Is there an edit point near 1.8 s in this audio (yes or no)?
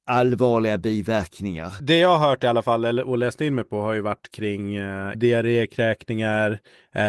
yes